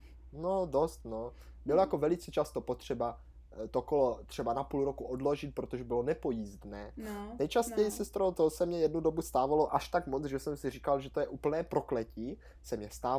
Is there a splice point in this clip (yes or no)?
no